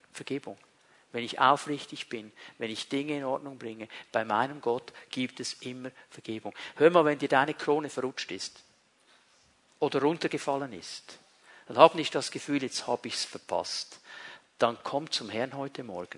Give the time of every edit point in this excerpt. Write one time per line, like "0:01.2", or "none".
0:04.1